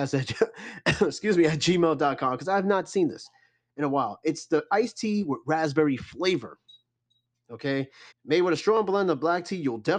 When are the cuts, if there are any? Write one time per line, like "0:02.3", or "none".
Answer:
0:08.1